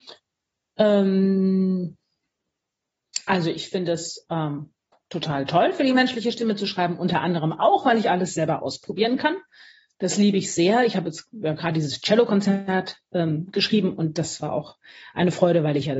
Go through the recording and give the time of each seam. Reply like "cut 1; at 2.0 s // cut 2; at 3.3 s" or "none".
none